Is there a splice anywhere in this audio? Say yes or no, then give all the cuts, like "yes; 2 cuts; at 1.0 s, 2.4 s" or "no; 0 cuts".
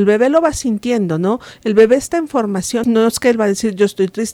yes; 1 cut; at 2.8 s